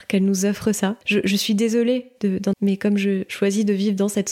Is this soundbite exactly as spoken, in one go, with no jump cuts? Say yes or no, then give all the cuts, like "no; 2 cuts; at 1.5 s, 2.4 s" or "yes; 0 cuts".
no; 2 cuts; at 1.0 s, 2.5 s